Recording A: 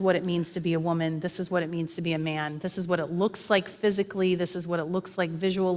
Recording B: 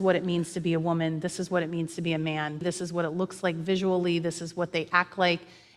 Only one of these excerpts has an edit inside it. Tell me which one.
B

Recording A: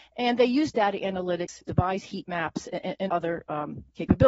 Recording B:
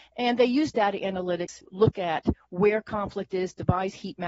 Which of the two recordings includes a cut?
A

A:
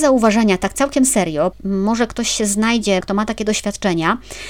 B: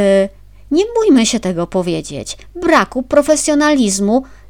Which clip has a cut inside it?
A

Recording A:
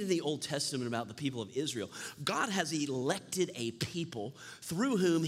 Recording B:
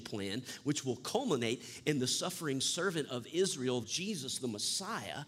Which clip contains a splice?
B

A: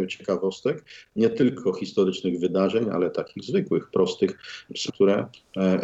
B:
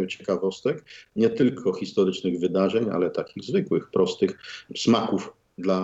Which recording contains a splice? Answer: A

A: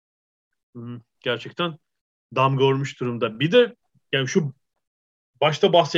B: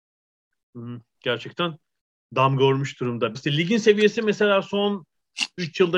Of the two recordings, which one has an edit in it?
B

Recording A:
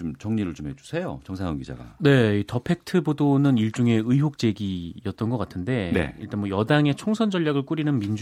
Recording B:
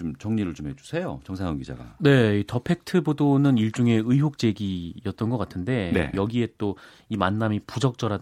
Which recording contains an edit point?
B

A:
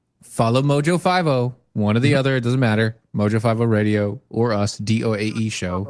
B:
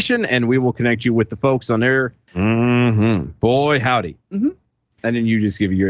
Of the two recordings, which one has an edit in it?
B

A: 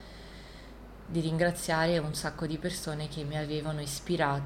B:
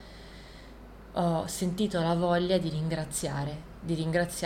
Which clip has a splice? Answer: A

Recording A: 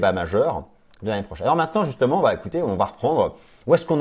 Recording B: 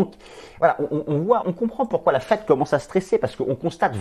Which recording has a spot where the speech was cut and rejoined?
B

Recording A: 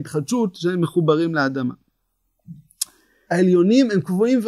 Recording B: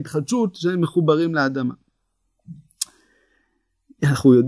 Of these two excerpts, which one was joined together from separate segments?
A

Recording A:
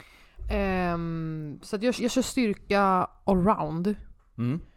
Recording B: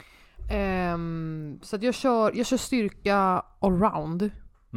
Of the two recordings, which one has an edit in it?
A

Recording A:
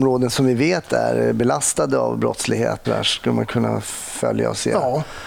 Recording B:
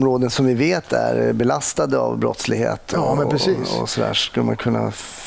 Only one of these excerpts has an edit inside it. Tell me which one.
A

